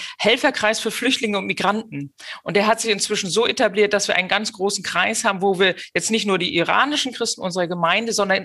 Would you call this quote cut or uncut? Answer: uncut